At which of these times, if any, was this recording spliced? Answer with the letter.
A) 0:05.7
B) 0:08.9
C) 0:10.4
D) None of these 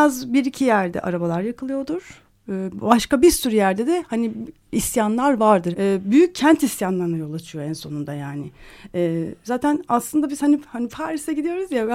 A